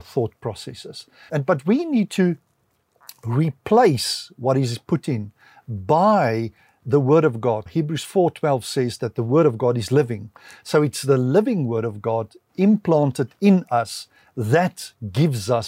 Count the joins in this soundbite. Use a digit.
2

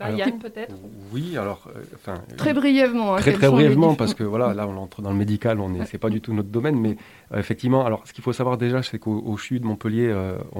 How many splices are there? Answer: 0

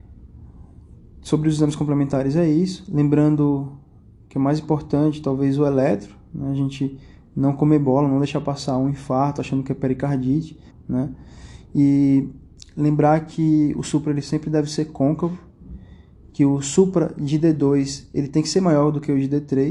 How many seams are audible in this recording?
1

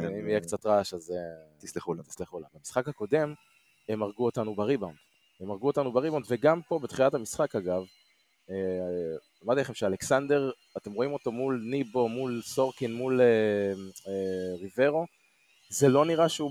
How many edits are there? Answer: 1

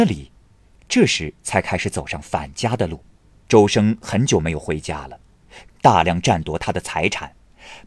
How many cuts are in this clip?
2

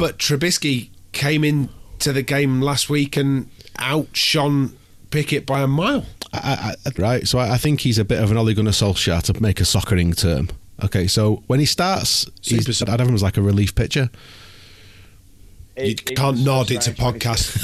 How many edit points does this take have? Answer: 3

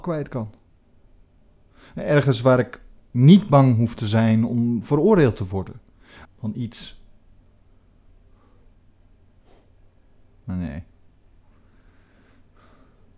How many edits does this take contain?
1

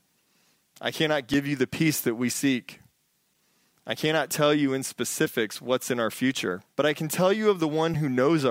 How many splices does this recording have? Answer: 1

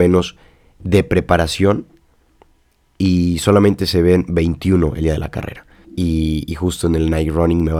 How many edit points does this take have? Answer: 1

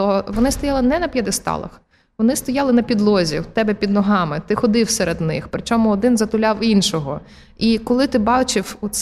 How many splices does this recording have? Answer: 0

